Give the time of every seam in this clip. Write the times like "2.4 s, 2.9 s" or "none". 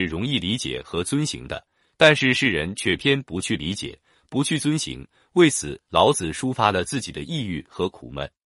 3.0 s